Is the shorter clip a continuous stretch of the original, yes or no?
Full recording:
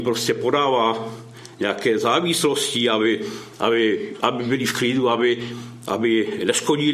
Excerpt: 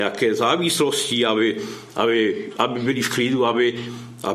yes